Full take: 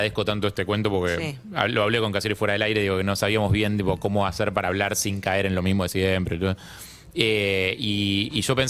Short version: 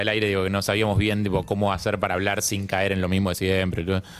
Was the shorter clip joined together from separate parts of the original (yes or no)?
no